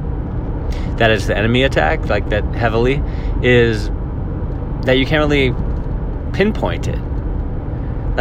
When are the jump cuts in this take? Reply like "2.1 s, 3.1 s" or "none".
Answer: none